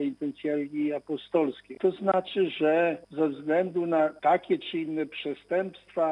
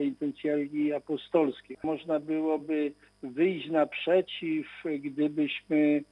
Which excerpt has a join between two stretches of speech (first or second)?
second